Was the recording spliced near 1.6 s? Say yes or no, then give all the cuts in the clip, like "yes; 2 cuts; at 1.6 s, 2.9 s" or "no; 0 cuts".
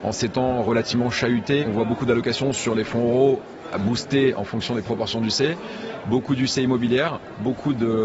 yes; 1 cut; at 1.6 s